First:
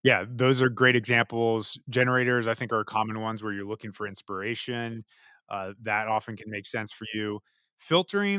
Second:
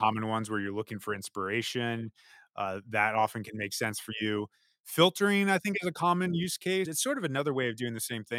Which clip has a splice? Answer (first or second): second